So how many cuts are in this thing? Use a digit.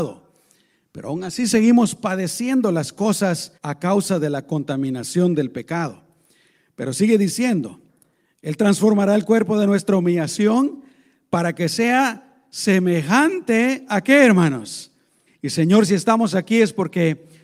2